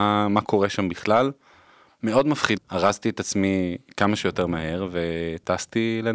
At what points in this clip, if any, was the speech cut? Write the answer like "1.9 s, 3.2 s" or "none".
2.6 s